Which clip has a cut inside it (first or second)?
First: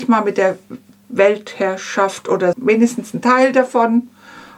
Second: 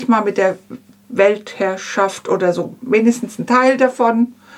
first